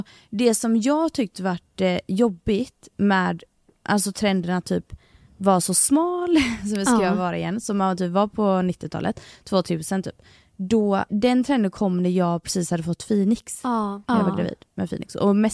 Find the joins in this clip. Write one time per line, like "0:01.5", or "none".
0:11.1
0:14.1